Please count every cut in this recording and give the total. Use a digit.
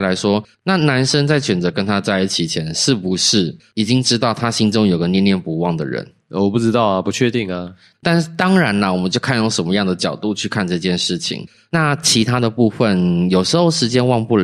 2